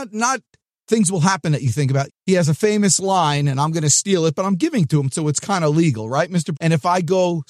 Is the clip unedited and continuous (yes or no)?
no